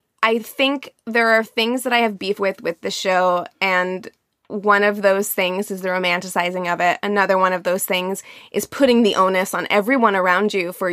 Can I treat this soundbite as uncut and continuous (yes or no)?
yes